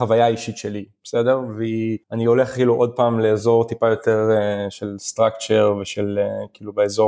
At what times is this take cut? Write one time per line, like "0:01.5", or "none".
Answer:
0:02.0